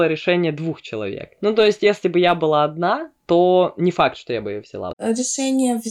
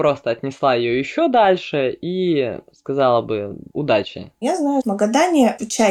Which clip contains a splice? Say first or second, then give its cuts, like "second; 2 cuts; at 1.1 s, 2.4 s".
first; 1 cut; at 4.9 s